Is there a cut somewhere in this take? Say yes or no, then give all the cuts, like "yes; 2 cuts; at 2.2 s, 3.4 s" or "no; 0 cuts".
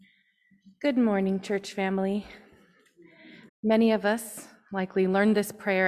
yes; 1 cut; at 3.5 s